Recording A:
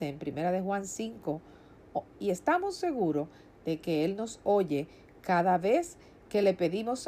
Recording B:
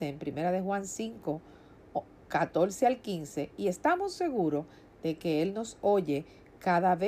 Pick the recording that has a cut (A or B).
A